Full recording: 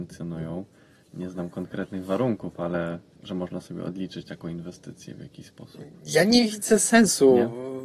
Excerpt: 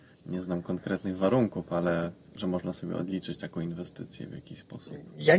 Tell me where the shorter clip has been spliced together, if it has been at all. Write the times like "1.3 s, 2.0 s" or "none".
none